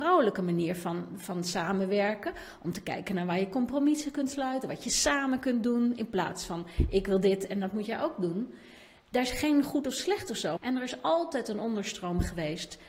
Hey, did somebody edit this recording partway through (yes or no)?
yes